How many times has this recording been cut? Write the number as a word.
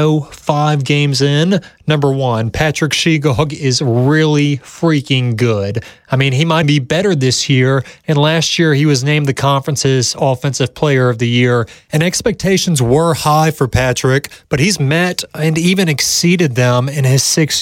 one